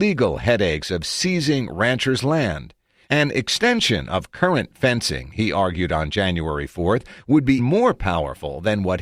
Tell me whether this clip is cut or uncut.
cut